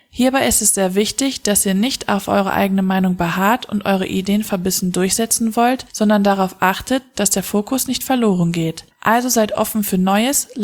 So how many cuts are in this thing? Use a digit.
1